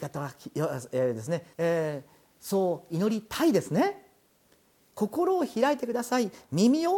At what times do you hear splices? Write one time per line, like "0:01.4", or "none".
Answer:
0:01.5